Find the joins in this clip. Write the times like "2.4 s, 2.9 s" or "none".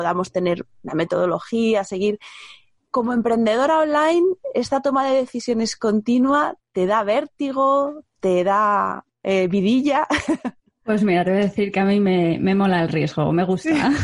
none

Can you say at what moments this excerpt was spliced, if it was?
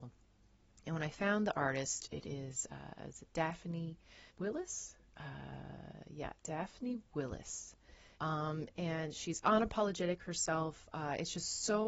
4.3 s, 8.2 s

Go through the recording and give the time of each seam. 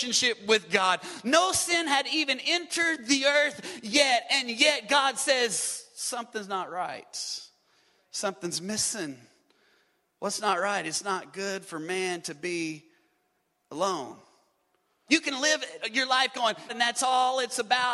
15.1 s, 16.7 s

